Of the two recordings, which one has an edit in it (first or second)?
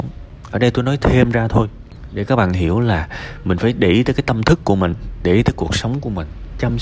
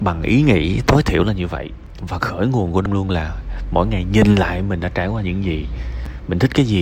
second